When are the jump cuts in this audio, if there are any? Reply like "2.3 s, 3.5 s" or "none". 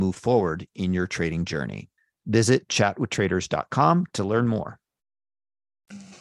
none